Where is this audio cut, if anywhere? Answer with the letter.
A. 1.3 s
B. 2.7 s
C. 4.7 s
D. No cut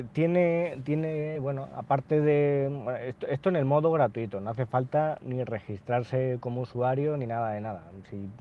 D